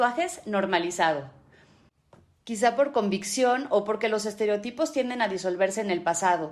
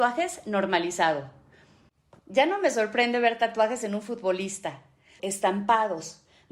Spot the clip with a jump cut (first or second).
second